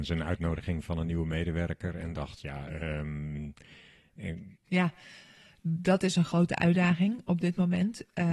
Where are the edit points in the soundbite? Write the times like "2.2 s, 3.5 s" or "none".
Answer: 4.6 s